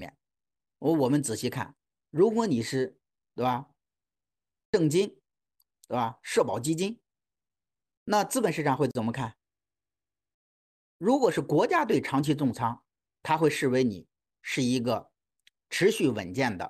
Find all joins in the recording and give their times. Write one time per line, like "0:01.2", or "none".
none